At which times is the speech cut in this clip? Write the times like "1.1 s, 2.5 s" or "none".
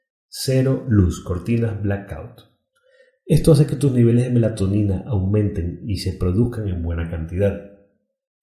none

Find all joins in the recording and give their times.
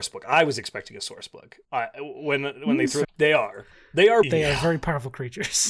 1.6 s, 3.0 s, 4.2 s

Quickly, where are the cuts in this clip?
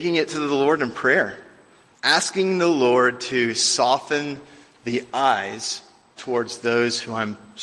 6.2 s

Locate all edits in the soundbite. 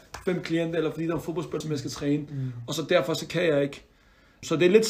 1.6 s

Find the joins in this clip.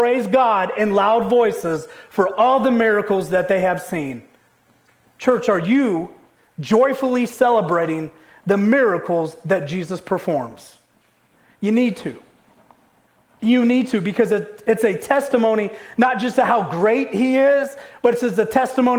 none

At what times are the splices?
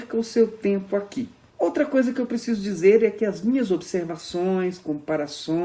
1.5 s

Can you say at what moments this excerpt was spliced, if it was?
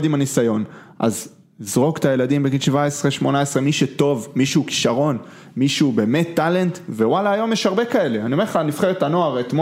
none

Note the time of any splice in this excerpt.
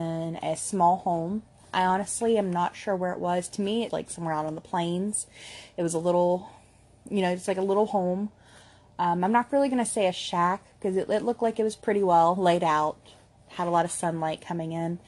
3.9 s

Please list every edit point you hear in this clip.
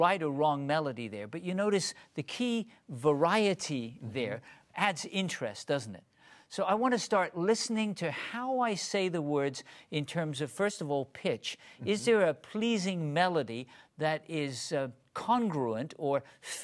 none

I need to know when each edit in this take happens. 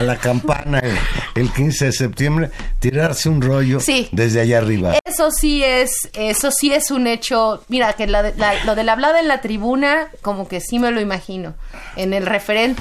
none

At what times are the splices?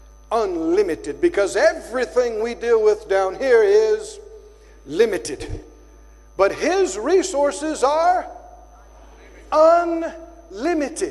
none

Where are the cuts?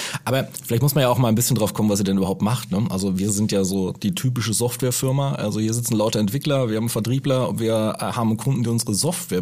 none

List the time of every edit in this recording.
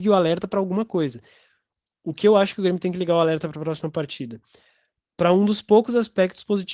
none

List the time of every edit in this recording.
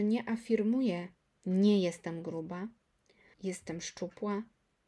3.3 s

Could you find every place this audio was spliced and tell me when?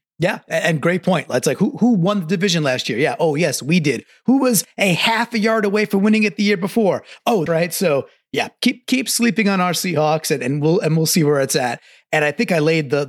7.5 s

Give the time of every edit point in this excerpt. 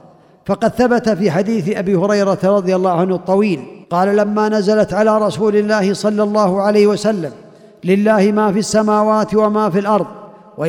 3.8 s

